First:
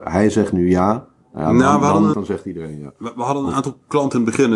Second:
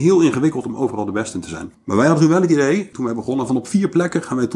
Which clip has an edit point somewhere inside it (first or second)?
first